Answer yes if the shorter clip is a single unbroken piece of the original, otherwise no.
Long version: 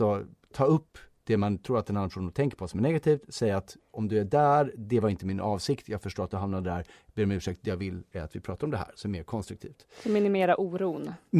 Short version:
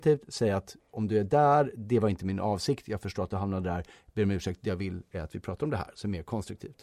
yes